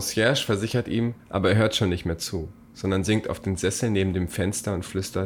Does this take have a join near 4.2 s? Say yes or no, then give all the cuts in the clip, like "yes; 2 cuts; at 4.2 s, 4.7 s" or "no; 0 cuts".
no; 1 cut; at 1.2 s